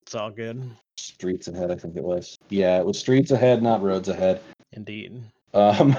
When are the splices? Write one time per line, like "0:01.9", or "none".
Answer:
0:04.6